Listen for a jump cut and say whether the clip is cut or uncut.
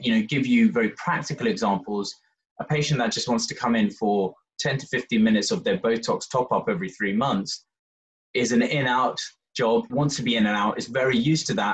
cut